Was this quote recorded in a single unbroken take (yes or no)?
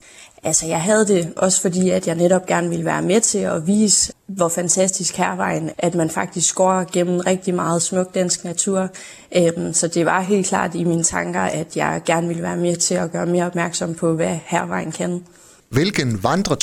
no